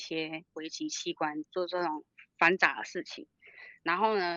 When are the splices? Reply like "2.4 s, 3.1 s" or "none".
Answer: 1.4 s